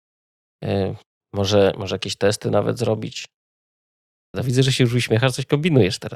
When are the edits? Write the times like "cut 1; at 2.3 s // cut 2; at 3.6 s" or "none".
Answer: cut 1; at 4.3 s